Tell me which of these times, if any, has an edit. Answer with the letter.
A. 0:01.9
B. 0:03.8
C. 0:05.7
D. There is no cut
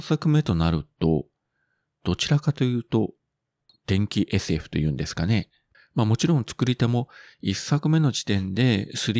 C